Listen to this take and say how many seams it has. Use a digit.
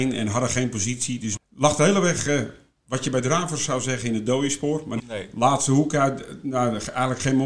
2